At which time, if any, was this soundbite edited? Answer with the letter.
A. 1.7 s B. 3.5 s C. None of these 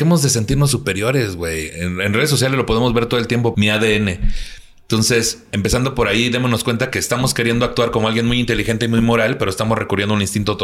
B